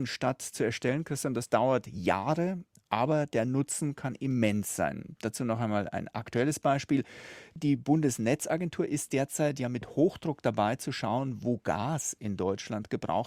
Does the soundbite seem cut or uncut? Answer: uncut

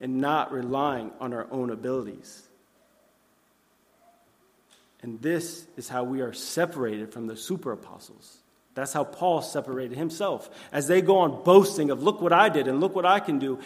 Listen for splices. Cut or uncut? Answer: uncut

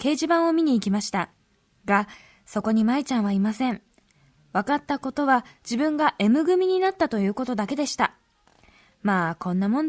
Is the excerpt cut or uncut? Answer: uncut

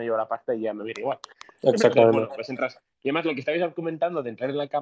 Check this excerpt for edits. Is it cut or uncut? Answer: uncut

